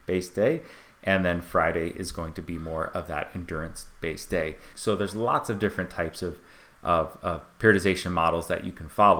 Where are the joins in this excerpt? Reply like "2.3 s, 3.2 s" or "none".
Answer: 4.7 s

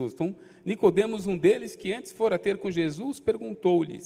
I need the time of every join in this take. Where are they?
none

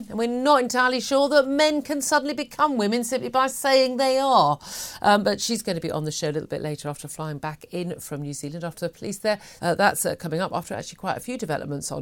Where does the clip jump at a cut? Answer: 9.6 s

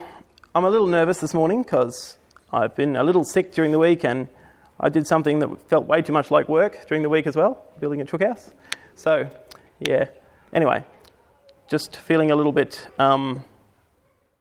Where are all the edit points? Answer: none

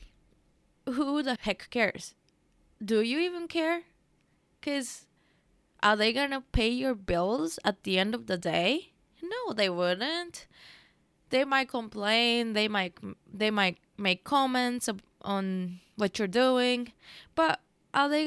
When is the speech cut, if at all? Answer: 1.4 s

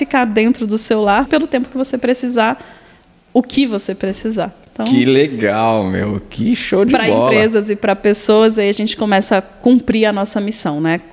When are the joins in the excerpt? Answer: 1.3 s

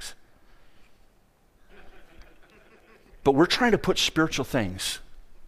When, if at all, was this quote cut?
1.7 s

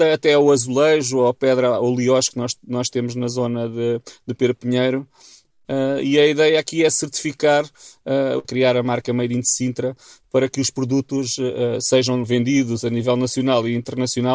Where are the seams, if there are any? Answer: 8.4 s, 12.2 s

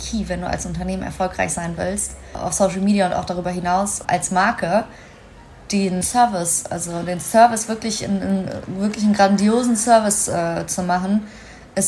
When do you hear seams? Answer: none

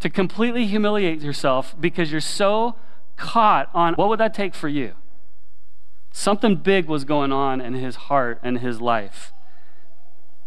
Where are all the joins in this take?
4.0 s

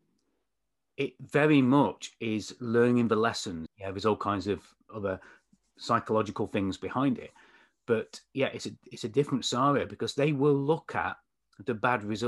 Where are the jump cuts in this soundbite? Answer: 3.7 s

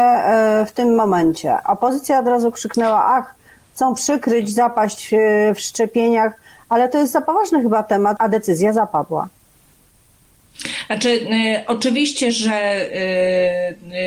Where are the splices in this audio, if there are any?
8.2 s

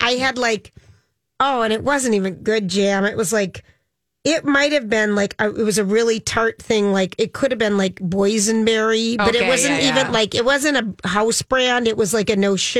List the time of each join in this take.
none

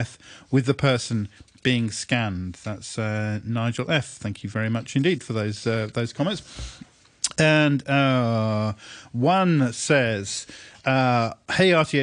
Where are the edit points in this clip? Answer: none

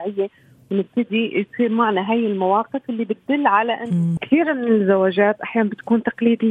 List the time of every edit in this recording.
4.2 s

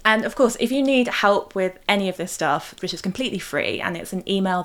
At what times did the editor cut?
2.8 s

